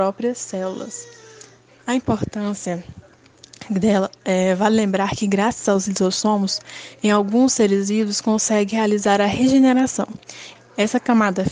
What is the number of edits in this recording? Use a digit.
2